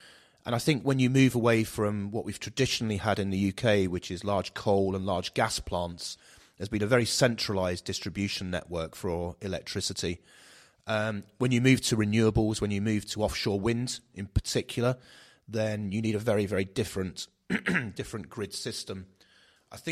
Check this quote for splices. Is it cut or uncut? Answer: uncut